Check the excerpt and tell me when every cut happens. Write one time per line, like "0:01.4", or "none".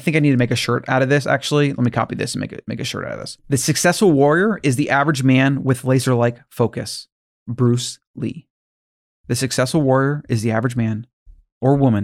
0:03.4